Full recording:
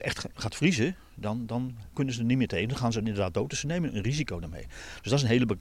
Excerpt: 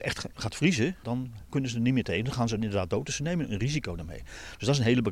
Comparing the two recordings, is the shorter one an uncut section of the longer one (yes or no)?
no